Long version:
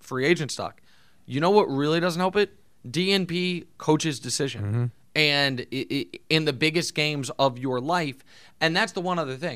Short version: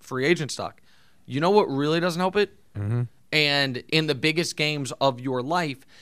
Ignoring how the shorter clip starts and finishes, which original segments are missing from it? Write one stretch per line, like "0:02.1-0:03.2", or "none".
0:02.7-0:04.6
0:05.7-0:06.2